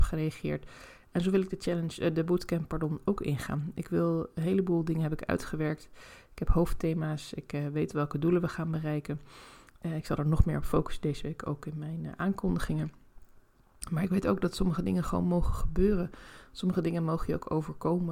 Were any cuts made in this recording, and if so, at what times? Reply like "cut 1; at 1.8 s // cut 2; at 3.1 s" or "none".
none